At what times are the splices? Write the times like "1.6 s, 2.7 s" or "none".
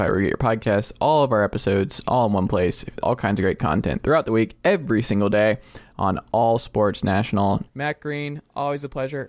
3.0 s, 7.7 s